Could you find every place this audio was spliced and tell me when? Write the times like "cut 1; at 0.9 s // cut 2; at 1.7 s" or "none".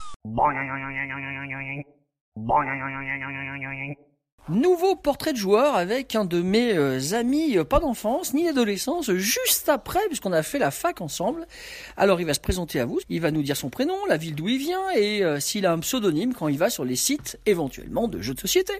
cut 1; at 13.0 s